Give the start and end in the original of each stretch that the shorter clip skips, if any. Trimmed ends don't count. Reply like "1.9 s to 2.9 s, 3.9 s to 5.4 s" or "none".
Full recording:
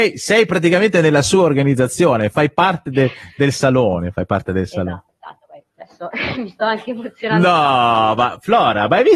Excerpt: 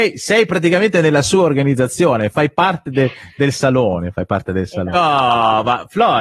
4.9 s to 7.5 s